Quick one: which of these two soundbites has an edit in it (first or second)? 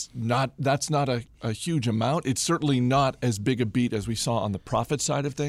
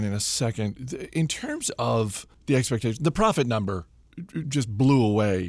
second